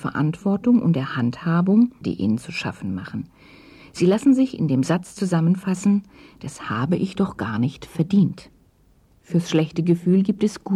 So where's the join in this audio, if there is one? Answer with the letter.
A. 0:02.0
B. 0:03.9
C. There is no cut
A